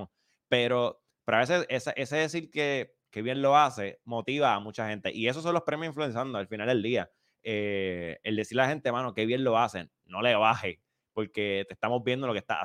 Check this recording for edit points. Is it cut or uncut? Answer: uncut